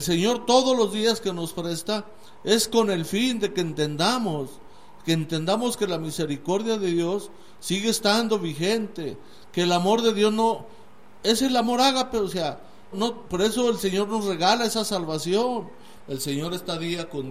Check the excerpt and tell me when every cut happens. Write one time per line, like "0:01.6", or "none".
0:12.9
0:16.0